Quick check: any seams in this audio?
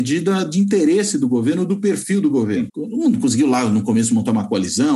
yes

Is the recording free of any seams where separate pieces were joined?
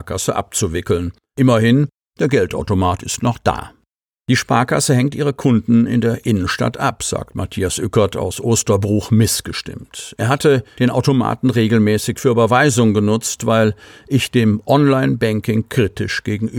yes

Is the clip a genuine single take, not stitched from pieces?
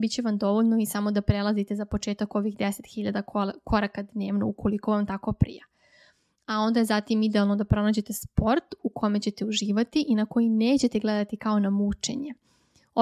yes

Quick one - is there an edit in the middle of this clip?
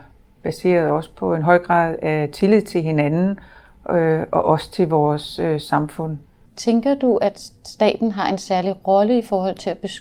yes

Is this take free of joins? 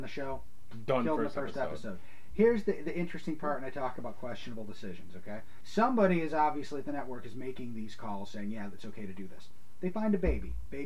yes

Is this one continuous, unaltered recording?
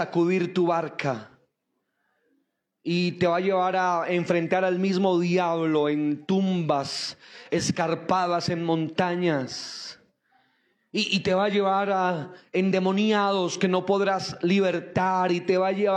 yes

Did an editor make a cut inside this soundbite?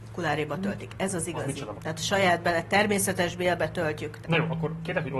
yes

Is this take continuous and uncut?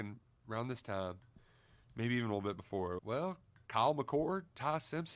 no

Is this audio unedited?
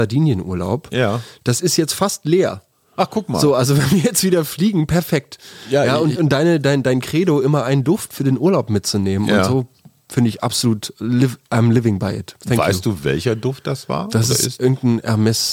yes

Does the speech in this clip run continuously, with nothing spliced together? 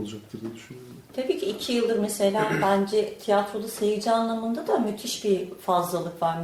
yes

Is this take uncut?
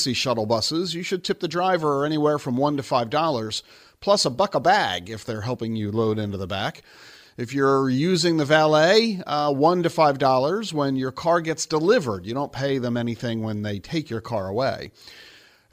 yes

